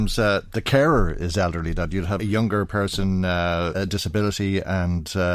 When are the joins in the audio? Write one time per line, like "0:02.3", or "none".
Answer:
0:02.2
0:03.7